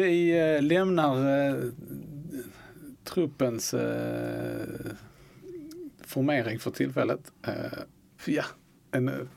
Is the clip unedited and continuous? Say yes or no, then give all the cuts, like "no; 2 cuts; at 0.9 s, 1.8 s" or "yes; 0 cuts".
no; 1 cut; at 8.2 s